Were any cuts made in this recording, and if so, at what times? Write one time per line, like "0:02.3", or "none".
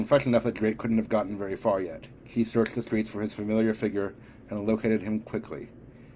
0:02.2